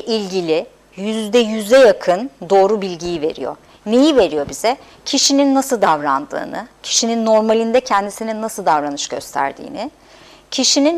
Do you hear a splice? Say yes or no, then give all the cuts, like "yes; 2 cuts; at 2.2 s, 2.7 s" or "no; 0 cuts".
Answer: no; 0 cuts